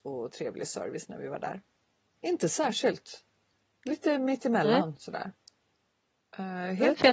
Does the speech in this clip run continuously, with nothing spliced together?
no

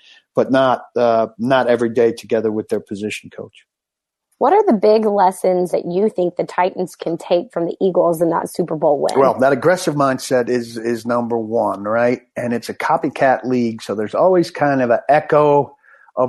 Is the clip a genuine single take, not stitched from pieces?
no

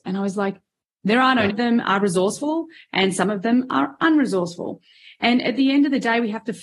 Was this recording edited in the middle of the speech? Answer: yes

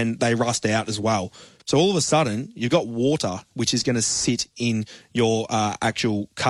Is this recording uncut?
no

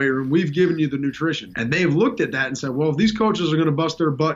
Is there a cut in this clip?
yes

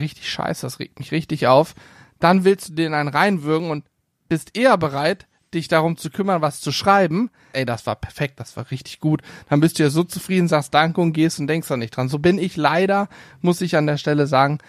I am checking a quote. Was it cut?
yes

